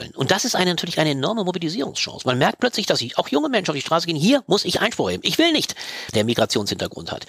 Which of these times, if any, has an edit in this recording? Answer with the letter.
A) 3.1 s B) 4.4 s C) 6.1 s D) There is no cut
C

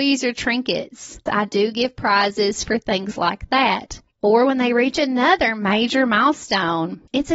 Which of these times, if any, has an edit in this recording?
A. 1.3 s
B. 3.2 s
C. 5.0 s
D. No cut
A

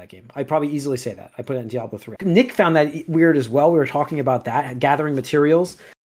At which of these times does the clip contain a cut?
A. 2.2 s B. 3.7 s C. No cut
A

